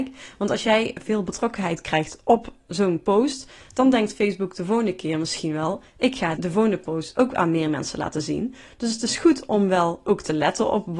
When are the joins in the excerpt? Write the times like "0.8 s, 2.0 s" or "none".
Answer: 6.4 s